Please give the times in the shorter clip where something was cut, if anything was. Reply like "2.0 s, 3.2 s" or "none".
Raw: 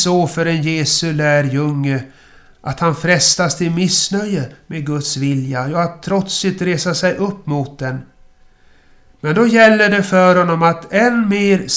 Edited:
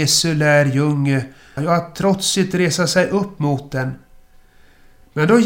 1.6 s